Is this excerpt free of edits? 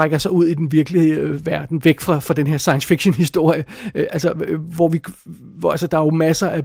yes; 0 cuts

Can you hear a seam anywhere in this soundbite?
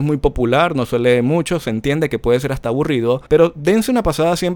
yes; 1 cut; at 3.3 s

